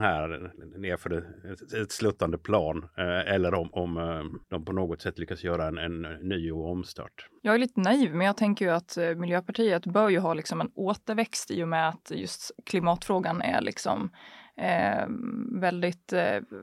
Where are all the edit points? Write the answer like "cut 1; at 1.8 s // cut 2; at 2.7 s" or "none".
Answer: cut 1; at 4.4 s